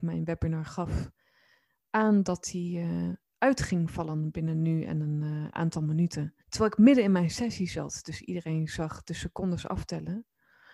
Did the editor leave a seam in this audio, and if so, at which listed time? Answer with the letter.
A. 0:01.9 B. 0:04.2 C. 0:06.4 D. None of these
C